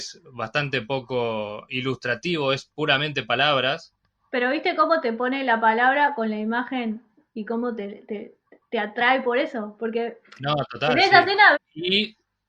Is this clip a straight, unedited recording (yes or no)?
no